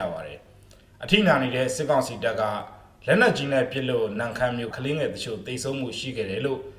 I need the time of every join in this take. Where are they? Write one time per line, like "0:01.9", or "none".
0:04.7